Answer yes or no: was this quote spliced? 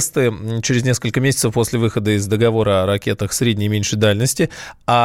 no